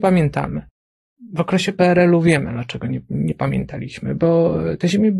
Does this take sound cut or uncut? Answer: uncut